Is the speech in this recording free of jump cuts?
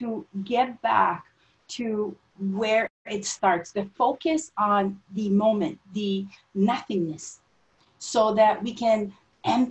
yes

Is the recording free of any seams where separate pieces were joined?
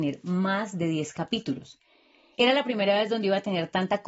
yes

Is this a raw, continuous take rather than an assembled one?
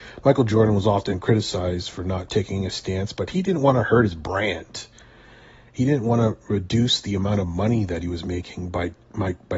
yes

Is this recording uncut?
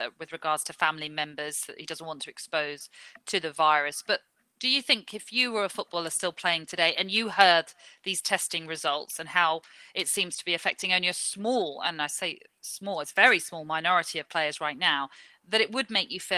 yes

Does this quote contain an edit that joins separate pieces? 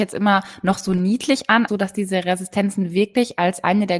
yes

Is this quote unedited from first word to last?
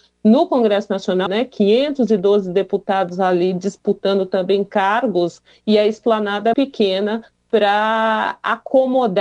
no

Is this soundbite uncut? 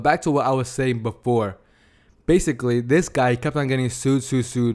yes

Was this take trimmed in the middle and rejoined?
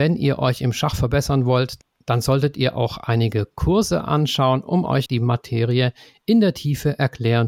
yes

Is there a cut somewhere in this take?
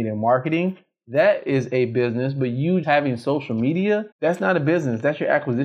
yes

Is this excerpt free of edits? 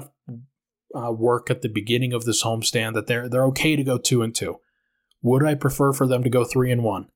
yes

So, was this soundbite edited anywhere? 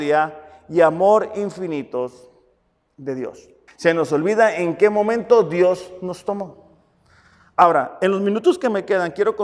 yes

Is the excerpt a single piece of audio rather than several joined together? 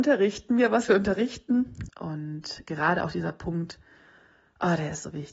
no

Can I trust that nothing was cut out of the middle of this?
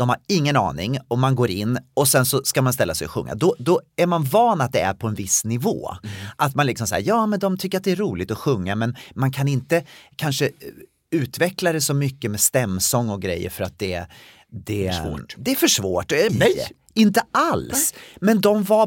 no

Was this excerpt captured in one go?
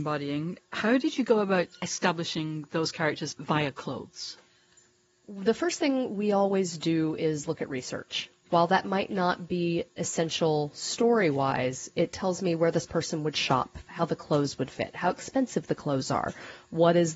no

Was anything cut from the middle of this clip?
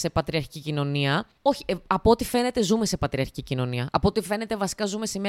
yes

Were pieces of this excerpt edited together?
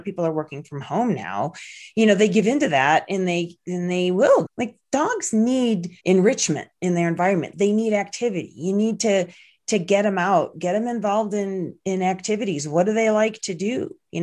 yes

